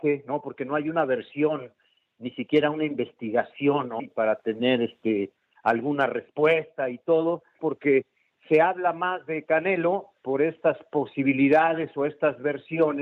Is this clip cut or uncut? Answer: cut